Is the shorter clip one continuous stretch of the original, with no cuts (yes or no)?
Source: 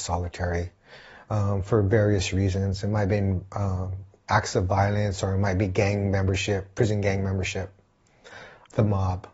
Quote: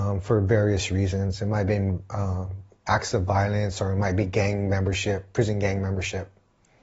yes